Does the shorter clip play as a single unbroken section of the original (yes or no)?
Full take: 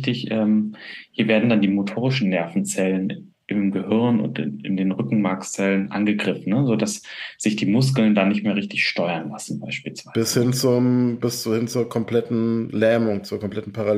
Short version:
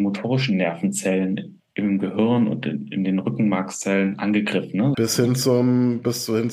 no